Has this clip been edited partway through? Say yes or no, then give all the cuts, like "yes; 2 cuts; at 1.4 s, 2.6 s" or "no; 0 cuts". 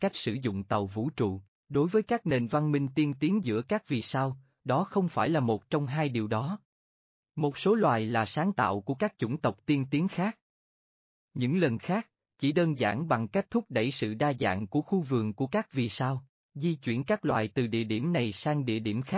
yes; 2 cuts; at 1.6 s, 7.2 s